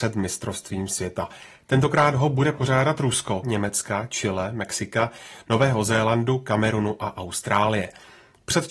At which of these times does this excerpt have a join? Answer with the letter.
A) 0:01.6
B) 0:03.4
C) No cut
B